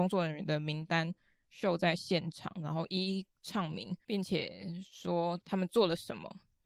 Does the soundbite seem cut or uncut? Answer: uncut